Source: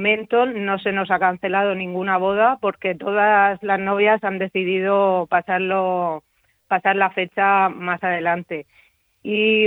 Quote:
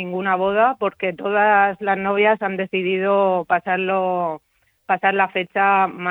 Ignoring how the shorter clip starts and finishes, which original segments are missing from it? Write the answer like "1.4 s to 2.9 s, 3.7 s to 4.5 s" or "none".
none